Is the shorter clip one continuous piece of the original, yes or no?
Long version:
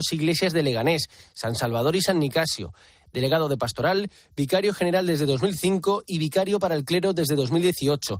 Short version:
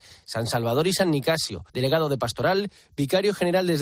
no